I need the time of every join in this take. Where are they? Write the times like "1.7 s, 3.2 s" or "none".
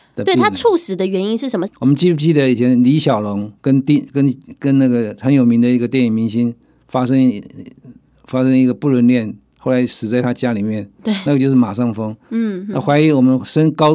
1.7 s, 3.6 s